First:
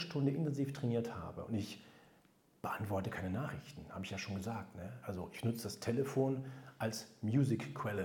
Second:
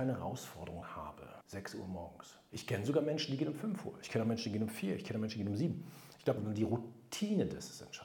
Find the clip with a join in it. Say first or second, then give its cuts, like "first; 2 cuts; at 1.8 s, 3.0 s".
second; 2 cuts; at 2.5 s, 6.4 s